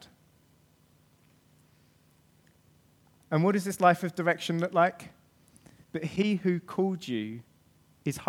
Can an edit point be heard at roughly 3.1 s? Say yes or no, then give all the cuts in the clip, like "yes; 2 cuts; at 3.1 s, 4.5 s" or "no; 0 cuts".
no; 1 cut; at 5.8 s